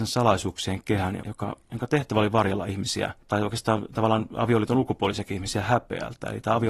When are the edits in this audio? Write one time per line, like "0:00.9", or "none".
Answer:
0:01.2
0:03.2